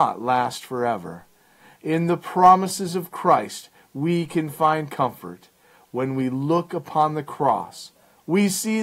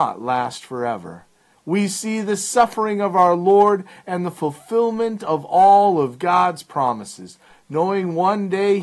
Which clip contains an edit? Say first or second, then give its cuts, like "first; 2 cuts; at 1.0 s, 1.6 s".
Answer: second; 1 cut; at 1.5 s